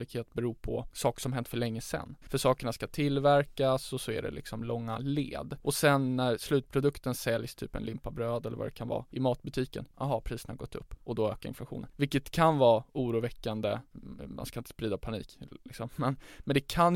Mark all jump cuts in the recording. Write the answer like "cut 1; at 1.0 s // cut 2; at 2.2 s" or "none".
cut 1; at 2.2 s // cut 2; at 9.9 s // cut 3; at 11.9 s

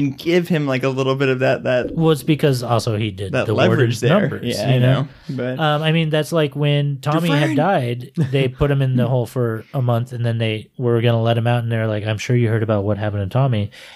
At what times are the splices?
none

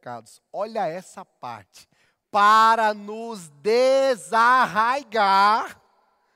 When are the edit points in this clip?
cut 1; at 2.2 s

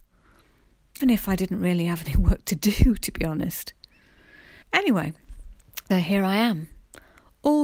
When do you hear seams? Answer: cut 1; at 1.0 s // cut 2; at 4.6 s // cut 3; at 5.9 s

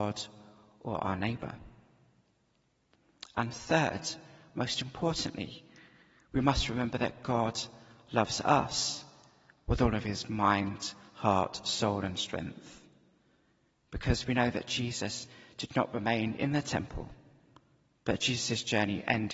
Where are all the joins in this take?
none

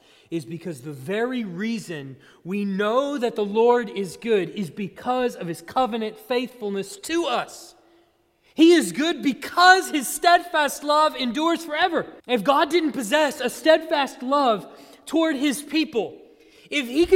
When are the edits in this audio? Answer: cut 1; at 12.2 s

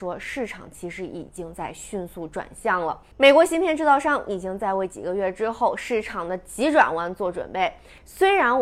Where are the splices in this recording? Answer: cut 1; at 3.1 s

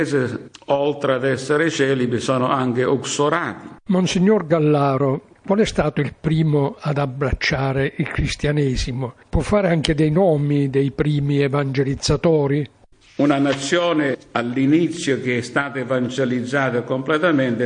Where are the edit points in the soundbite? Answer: cut 1; at 5.4 s

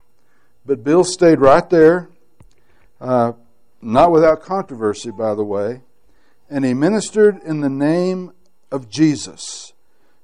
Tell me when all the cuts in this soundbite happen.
none

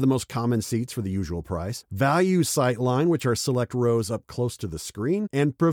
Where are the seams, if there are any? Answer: none

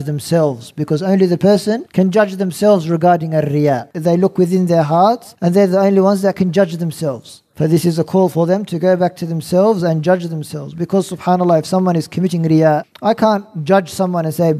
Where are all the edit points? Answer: none

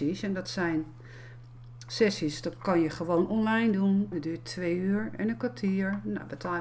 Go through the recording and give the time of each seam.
cut 1; at 4.1 s

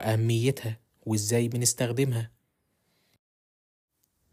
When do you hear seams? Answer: none

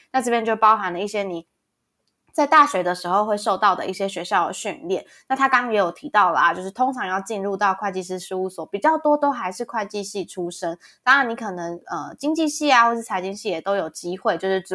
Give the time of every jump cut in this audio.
none

